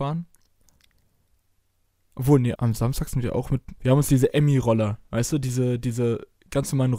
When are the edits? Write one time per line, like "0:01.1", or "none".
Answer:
0:02.5
0:03.8